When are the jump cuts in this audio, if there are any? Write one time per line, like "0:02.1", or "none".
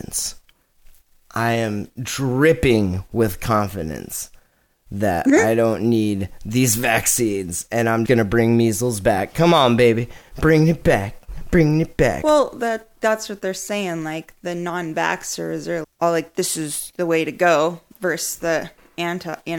0:08.1
0:15.8